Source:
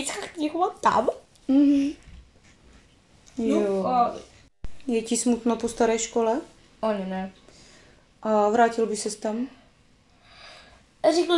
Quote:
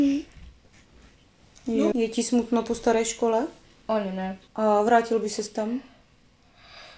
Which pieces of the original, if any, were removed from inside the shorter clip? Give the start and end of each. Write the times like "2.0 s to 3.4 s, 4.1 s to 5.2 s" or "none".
3.6 s to 4.8 s, 7.4 s to 8.1 s